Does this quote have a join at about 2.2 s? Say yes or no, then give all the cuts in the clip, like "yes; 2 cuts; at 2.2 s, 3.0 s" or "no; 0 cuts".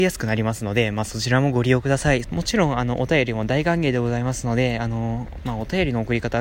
yes; 1 cut; at 2.2 s